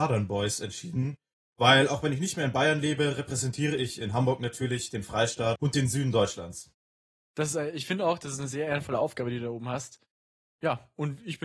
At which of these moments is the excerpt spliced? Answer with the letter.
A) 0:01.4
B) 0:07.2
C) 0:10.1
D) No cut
D